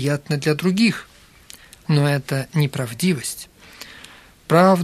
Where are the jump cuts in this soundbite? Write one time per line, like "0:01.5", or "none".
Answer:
none